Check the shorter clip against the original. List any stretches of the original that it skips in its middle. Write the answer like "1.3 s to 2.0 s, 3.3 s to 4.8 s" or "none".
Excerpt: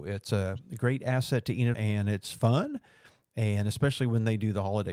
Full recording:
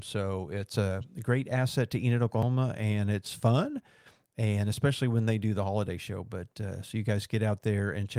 2.2 s to 2.7 s